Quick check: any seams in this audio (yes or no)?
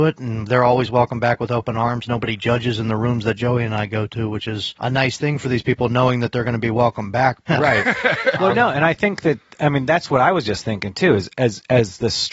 yes